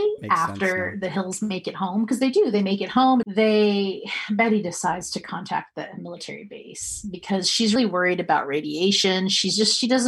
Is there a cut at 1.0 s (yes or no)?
no